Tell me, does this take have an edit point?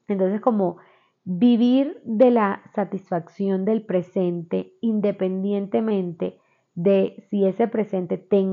no; 0 cuts

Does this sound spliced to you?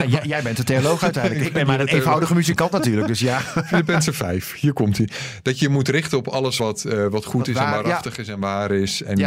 no; 0 cuts

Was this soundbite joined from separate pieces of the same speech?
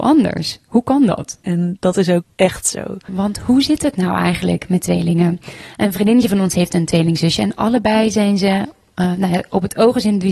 yes; 2 cuts; at 1.4 s, 3.1 s

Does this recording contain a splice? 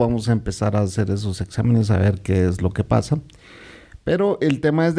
no; 0 cuts

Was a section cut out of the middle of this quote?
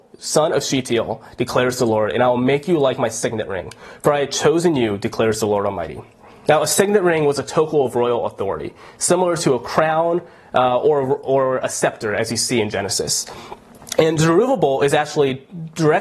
no; 0 cuts

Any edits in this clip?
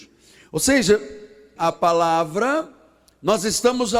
yes; 1 cut; at 1.6 s

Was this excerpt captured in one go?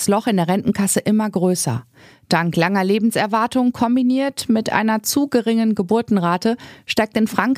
yes; 0 cuts

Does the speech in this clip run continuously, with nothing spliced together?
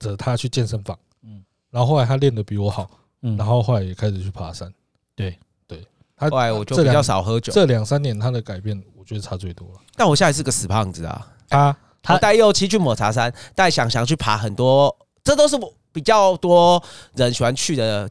no; 1 cut; at 11.5 s

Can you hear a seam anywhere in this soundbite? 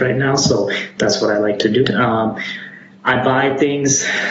yes; 1 cut; at 1.8 s

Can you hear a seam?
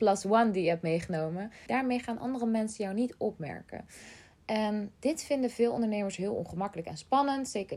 yes; 1 cut; at 1.7 s

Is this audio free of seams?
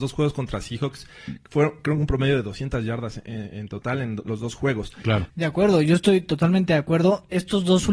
no; 1 cut; at 5.3 s

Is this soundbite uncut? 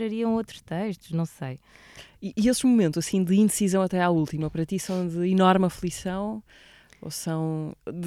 yes; 0 cuts

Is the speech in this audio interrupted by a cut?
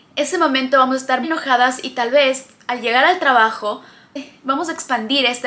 yes; 1 cut; at 1.2 s

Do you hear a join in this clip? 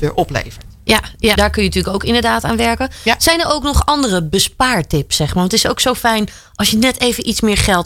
yes; 1 cut; at 1.3 s

